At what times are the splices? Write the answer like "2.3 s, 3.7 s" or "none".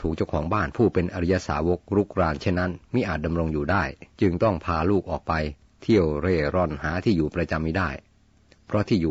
4.1 s